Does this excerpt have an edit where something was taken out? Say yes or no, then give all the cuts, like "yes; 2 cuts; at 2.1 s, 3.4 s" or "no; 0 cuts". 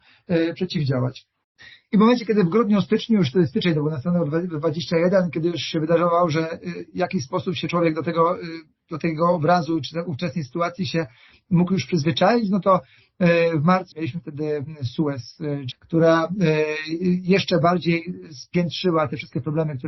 yes; 2 cuts; at 13.9 s, 15.7 s